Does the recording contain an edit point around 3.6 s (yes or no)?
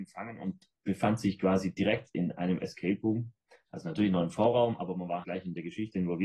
no